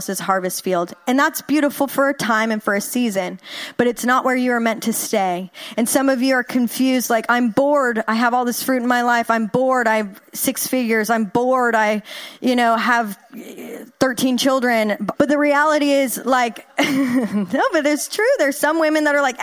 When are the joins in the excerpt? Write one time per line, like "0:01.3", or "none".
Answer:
0:15.1